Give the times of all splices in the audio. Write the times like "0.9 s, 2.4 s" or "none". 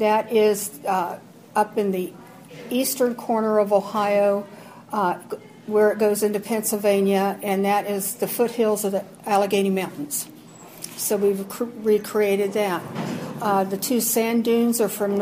none